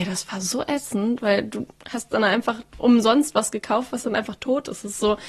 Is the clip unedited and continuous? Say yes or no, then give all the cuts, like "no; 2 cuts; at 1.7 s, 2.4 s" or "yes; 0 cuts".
yes; 0 cuts